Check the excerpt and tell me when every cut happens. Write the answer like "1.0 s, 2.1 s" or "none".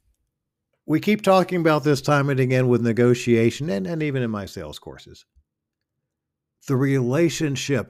none